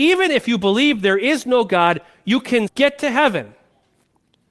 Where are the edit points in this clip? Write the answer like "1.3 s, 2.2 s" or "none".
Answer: 2.7 s